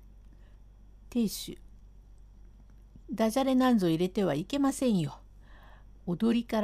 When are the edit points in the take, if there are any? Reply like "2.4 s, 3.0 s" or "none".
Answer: 1.0 s, 3.0 s